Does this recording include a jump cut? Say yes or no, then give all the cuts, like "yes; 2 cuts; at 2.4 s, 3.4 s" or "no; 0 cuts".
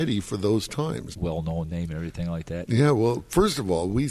yes; 2 cuts; at 1.1 s, 2.7 s